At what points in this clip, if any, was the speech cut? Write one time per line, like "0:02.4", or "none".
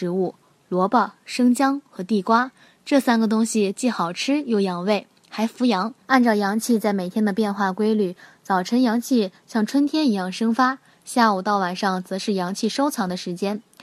0:06.0